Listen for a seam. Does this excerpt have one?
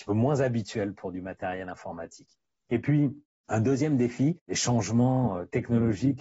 no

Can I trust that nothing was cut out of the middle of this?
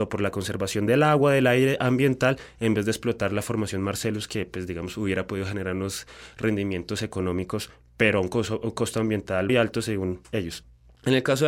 no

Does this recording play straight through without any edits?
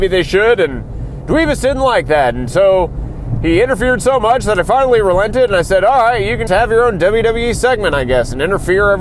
no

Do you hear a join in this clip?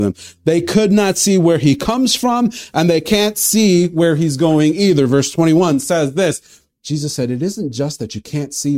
yes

